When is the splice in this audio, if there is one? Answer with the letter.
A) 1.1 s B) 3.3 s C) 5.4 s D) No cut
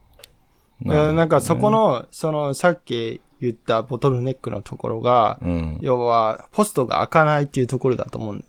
D